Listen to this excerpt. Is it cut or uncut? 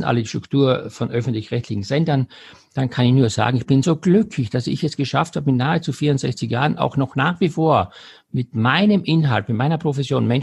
uncut